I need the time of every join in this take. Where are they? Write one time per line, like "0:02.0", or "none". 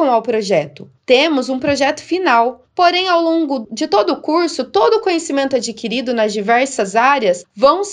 0:01.0

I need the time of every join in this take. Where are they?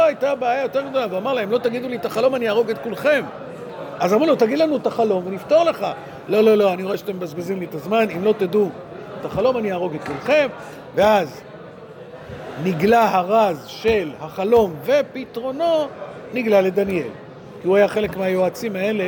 none

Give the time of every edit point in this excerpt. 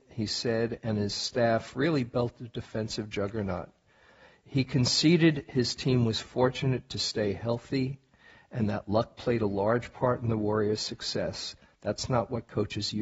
none

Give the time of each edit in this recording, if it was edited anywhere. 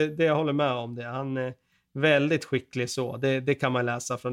none

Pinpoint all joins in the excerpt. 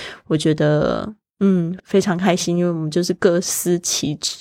0:01.8

